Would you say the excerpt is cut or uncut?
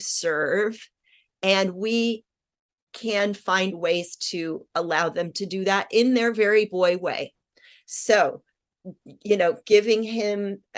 uncut